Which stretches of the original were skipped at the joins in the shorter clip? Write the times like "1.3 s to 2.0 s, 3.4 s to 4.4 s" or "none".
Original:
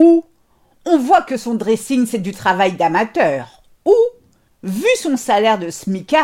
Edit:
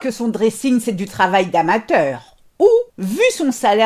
4.2 s to 4.5 s